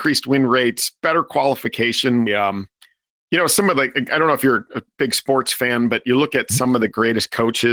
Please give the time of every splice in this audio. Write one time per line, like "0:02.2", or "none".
0:02.3